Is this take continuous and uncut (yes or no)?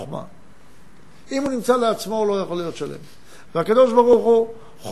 no